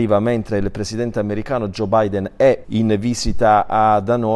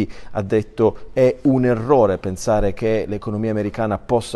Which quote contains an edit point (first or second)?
first